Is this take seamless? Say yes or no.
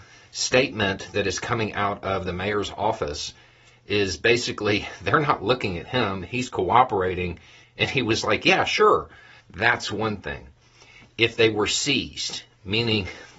no